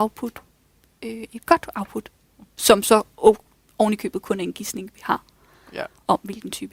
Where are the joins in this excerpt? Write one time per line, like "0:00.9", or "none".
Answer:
0:02.5
0:04.9